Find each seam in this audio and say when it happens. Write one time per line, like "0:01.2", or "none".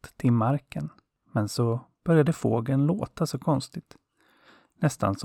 0:01.2